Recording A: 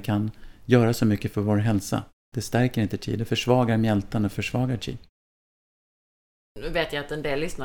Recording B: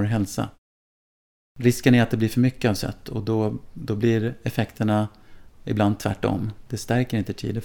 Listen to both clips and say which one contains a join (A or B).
A